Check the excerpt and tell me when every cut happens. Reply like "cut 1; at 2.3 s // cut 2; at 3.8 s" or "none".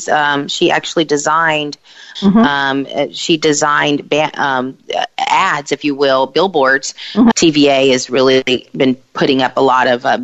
cut 1; at 2.2 s // cut 2; at 7.3 s